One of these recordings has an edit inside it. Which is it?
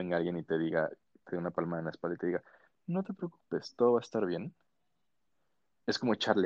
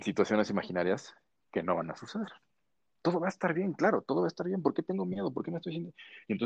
second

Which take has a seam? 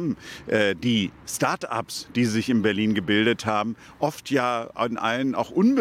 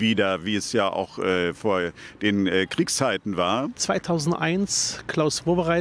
second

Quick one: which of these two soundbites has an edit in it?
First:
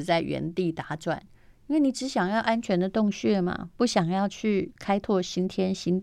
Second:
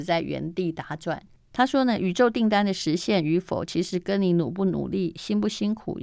second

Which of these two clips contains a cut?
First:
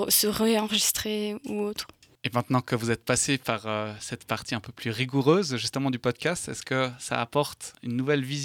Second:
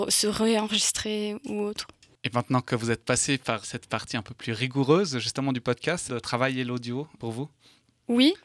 second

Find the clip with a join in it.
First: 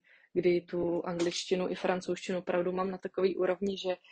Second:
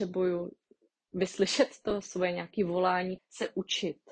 second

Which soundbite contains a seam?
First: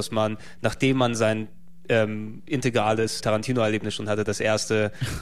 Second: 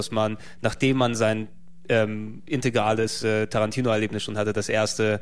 first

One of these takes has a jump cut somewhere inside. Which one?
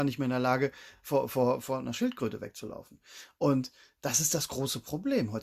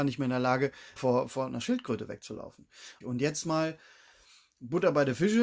second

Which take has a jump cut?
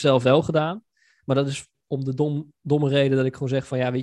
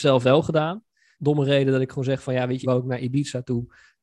second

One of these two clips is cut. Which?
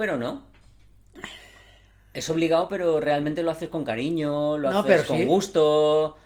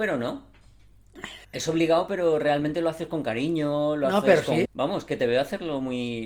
second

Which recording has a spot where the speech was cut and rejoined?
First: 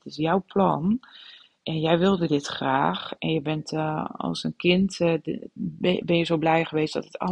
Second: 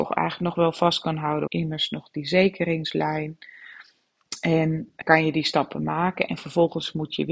second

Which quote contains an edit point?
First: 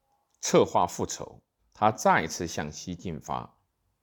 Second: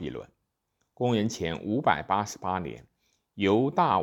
first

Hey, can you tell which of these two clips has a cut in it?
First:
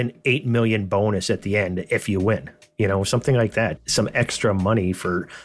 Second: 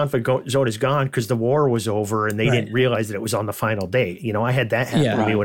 first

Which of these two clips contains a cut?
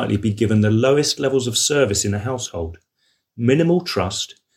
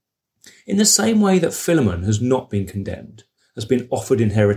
second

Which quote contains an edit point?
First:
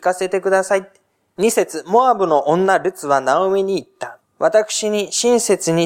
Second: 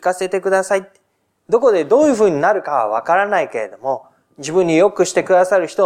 first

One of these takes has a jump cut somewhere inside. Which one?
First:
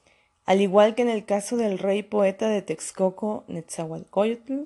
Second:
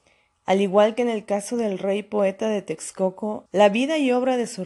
second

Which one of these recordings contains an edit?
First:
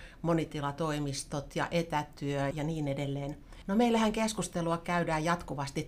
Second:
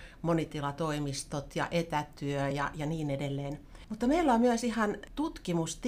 first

